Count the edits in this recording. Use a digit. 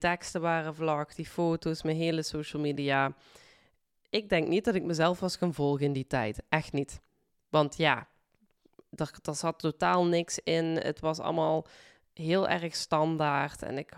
0